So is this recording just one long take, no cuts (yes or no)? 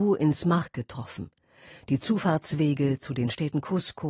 yes